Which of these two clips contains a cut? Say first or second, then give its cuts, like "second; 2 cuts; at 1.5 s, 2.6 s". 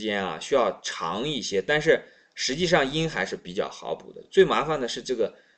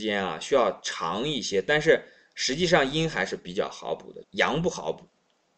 second; 1 cut; at 4.2 s